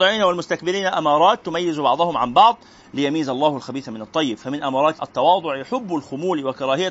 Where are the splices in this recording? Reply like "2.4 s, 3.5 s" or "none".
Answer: 5.0 s